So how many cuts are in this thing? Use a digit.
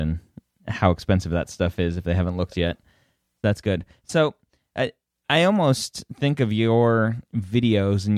0